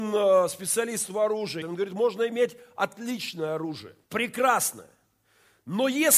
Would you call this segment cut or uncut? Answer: cut